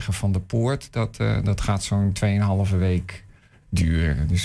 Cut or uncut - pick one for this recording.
uncut